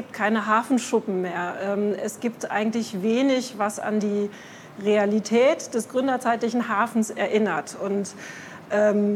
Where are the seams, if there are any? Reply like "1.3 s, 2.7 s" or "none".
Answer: none